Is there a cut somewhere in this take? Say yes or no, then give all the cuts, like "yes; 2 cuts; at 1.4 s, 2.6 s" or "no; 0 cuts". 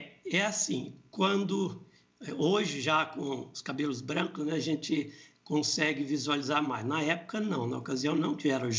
no; 0 cuts